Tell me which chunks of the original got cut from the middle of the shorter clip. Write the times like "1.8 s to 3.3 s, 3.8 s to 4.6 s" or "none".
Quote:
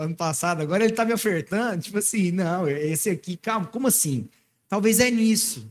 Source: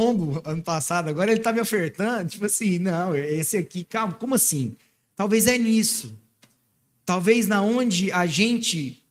none